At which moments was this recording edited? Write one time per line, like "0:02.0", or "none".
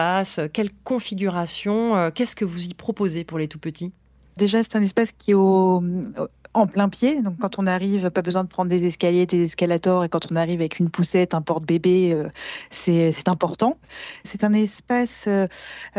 0:04.4